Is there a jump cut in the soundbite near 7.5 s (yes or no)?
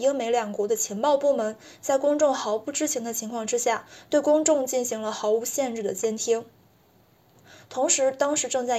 yes